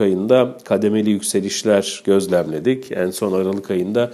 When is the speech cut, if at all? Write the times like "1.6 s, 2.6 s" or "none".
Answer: none